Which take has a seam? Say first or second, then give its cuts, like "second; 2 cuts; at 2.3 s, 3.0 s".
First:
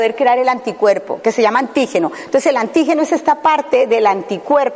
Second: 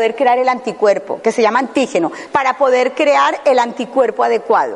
second; 1 cut; at 2.3 s